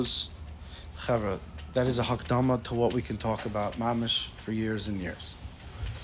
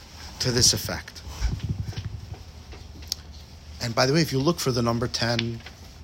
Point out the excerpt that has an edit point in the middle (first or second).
first